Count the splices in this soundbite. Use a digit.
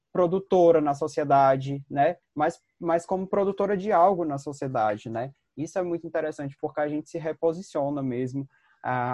1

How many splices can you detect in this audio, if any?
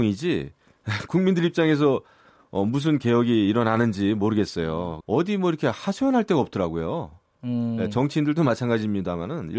1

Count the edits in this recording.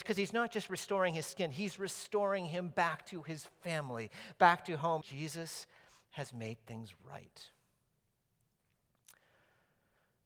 1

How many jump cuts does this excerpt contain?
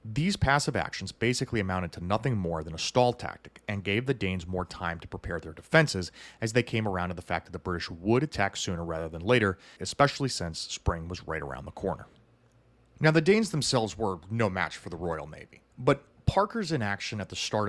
1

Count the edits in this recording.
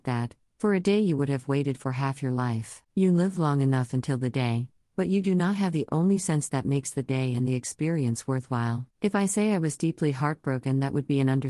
2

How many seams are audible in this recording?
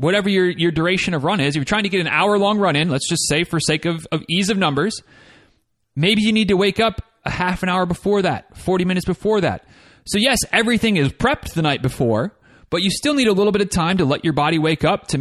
0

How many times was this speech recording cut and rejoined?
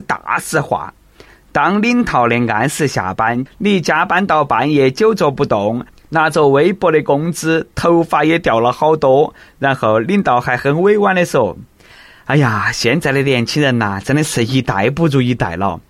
1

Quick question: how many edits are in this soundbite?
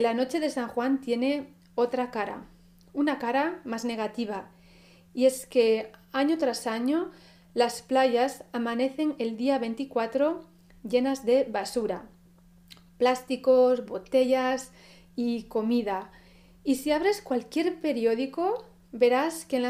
0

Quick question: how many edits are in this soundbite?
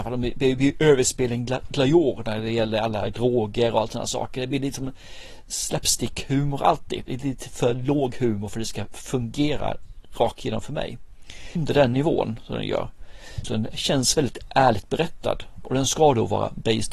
2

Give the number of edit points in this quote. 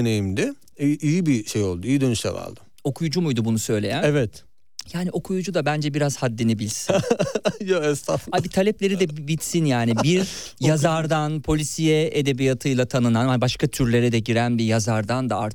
0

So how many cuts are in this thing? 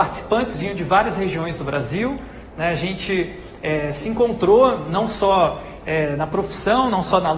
0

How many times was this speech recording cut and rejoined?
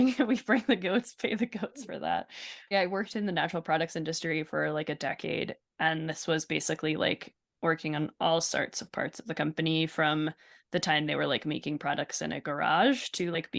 1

